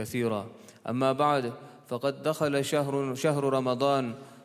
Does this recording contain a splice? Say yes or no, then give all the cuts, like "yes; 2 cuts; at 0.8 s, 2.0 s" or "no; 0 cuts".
no; 0 cuts